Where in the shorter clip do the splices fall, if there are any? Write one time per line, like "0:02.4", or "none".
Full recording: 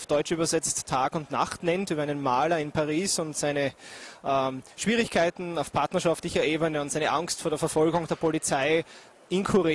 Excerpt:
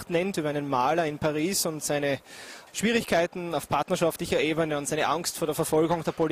0:02.7